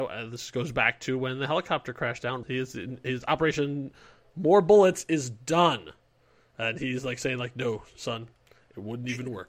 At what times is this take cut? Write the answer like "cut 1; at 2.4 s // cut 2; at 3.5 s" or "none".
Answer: cut 1; at 2.4 s